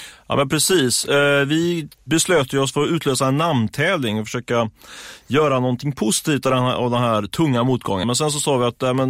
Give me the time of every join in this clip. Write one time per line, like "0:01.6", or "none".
0:08.0